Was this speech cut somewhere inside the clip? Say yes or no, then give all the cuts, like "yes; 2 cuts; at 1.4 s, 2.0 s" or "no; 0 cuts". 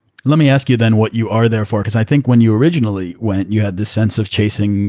no; 0 cuts